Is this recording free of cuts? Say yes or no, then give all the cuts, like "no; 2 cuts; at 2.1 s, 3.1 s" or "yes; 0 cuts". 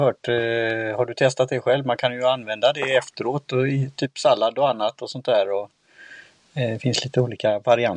yes; 0 cuts